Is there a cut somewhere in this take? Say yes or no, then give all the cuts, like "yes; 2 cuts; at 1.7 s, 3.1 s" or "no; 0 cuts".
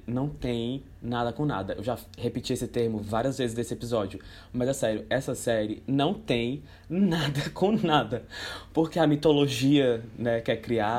no; 0 cuts